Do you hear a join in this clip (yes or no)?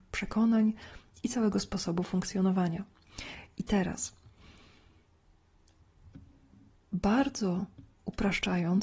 no